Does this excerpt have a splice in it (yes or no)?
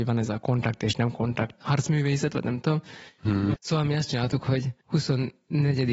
yes